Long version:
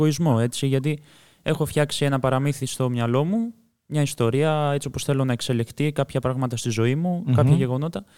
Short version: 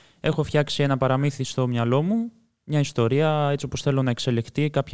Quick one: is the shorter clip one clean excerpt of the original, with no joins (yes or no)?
yes